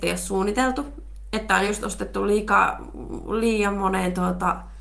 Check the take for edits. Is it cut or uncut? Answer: uncut